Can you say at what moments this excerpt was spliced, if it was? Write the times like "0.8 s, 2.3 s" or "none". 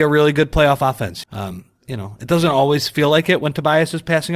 1.2 s

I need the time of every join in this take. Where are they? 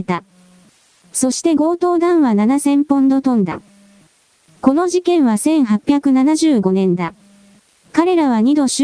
7.8 s

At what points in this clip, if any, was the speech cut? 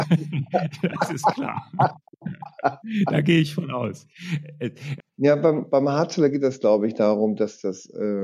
5.0 s

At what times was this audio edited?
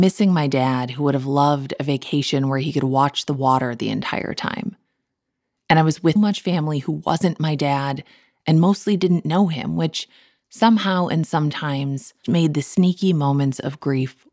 6.2 s, 12.2 s

